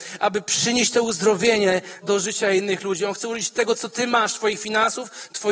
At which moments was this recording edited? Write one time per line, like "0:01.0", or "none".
0:02.0